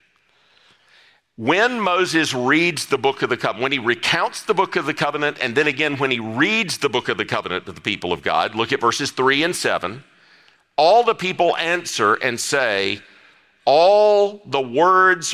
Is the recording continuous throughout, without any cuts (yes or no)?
yes